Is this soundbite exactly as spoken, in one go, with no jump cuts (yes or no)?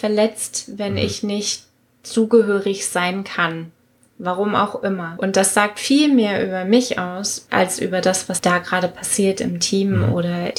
yes